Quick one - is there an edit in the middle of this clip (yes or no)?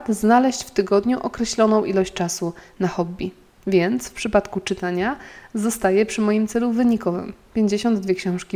yes